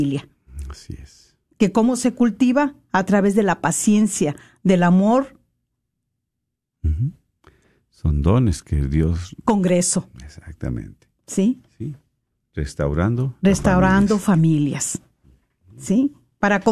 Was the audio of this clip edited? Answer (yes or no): yes